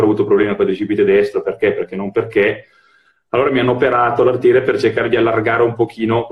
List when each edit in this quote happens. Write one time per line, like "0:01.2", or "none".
none